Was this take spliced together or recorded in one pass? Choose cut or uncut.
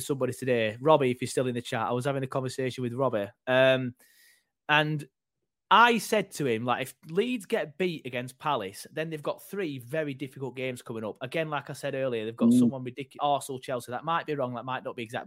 cut